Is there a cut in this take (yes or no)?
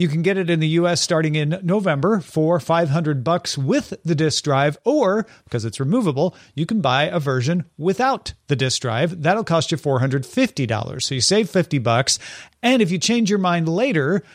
no